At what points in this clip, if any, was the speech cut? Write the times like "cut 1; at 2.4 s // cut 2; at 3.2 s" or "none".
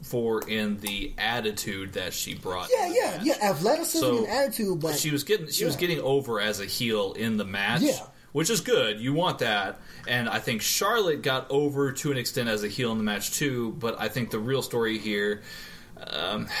none